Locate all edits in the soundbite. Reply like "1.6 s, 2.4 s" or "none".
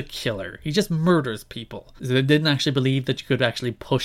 2.0 s